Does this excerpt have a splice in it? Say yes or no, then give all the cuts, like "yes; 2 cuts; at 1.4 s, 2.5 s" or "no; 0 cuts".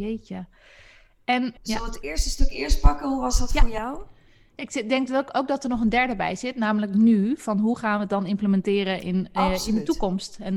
yes; 1 cut; at 1.6 s